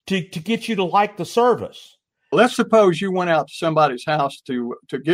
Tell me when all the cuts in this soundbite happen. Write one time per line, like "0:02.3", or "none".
0:02.3